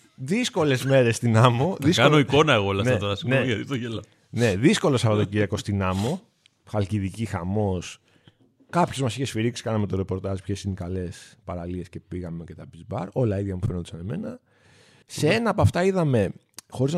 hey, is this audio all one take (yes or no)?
no